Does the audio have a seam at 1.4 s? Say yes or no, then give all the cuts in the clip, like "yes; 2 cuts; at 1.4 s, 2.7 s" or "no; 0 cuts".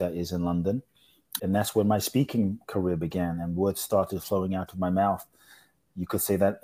yes; 1 cut; at 1.4 s